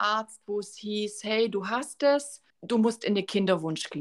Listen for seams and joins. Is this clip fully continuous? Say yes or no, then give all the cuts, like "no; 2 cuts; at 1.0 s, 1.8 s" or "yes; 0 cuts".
no; 1 cut; at 2.5 s